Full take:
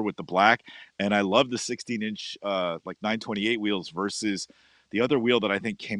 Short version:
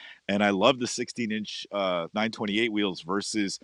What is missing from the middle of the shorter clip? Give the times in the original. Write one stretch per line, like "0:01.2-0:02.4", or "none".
0:02.8-0:03.0